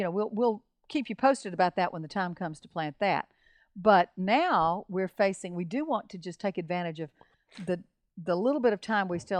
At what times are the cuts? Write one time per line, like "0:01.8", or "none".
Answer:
none

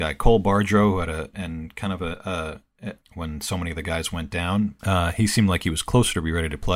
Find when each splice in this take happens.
0:01.3
0:03.0
0:04.8

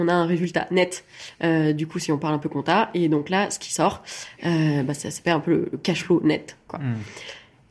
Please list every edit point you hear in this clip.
none

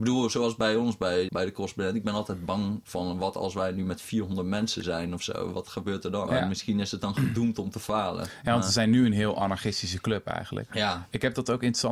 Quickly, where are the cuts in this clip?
0:01.3
0:06.3

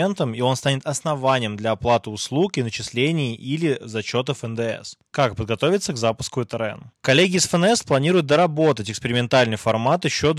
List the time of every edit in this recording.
0:05.1
0:06.9

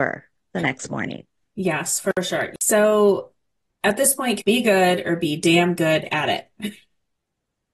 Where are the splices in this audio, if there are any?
0:04.4

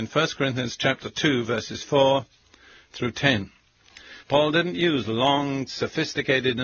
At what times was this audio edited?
0:04.2
0:05.7

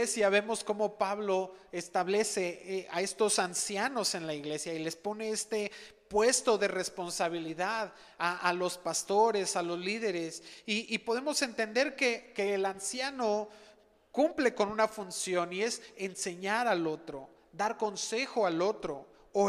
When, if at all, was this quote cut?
none

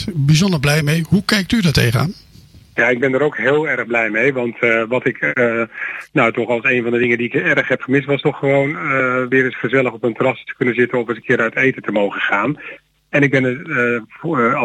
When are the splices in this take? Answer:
none

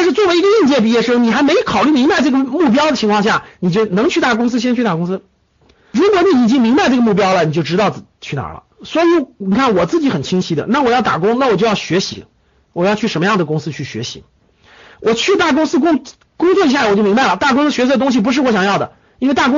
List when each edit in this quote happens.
none

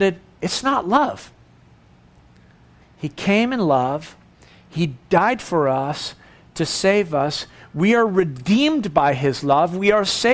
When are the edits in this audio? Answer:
0:02.8

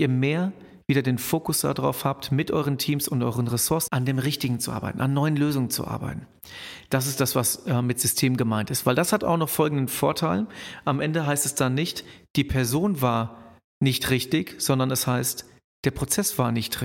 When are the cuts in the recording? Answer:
0:03.9

